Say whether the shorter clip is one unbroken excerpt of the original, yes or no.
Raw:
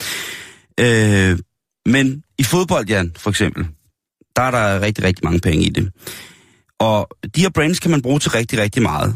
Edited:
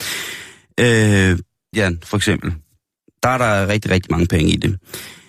no